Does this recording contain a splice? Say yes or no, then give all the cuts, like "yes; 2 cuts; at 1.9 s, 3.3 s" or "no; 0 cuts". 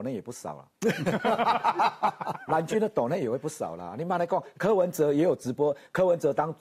no; 0 cuts